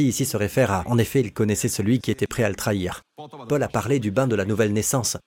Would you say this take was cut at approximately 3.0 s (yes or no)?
yes